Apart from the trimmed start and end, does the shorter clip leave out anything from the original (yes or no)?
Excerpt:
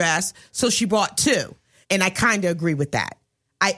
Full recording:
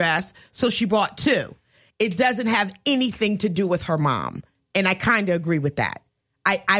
yes